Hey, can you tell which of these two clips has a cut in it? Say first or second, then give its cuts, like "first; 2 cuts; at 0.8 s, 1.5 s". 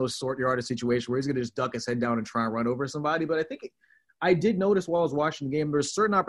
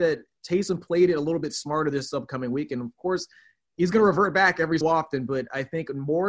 second; 1 cut; at 4.8 s